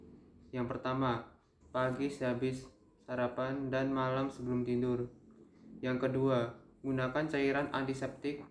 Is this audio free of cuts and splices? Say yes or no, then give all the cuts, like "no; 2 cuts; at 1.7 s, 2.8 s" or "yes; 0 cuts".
no; 1 cut; at 1.6 s